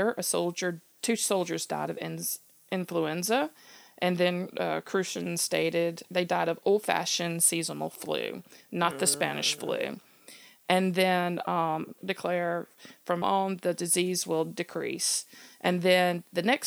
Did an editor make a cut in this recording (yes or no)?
yes